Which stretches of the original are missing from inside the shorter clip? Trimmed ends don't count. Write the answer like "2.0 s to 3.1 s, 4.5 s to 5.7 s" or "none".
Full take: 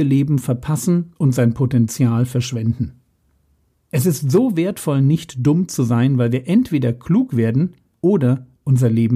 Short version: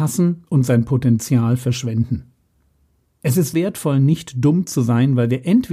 4.2 s to 4.6 s